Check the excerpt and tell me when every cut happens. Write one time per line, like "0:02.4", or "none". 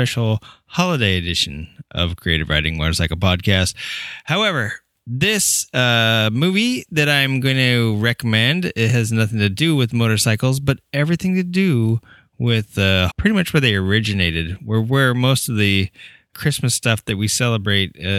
0:13.1
0:16.3